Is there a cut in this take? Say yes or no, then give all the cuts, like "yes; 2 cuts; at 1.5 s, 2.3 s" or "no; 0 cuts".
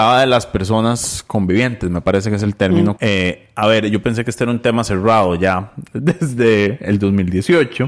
yes; 1 cut; at 3.0 s